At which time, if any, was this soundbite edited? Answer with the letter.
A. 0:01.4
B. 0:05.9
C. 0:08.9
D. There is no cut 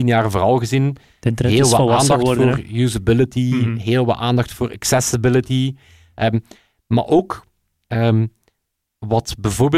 D